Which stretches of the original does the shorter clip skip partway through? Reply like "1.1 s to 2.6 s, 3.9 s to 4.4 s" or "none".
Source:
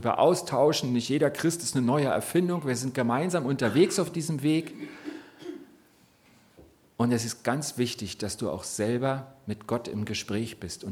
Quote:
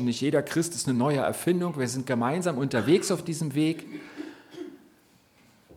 none